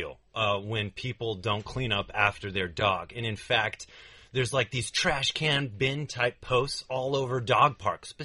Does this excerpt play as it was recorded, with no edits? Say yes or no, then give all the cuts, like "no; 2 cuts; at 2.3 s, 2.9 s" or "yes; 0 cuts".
yes; 0 cuts